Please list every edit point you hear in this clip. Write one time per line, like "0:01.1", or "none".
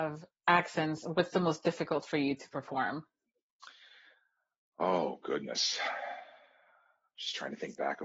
none